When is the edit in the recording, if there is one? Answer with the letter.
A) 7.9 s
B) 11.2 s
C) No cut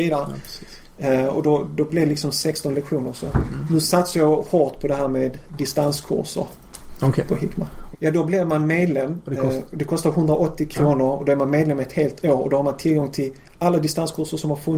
A